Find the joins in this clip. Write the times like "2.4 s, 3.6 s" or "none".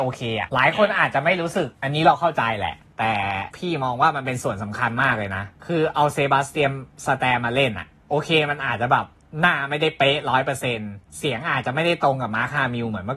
1.7 s, 11.1 s